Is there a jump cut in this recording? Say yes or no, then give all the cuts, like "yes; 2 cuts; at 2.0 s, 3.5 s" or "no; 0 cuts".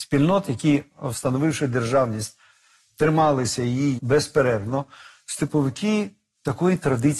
yes; 1 cut; at 4.0 s